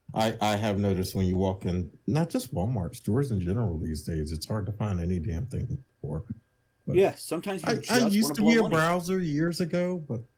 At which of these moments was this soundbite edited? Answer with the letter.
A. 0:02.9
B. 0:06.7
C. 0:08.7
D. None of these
D